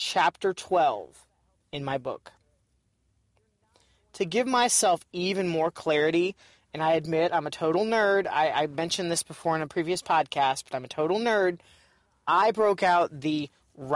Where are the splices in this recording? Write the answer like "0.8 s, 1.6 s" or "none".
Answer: none